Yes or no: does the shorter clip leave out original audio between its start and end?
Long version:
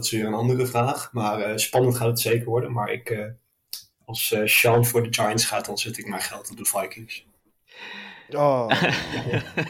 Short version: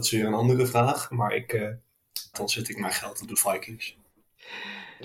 yes